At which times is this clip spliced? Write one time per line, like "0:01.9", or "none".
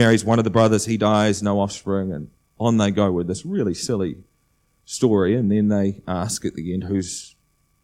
none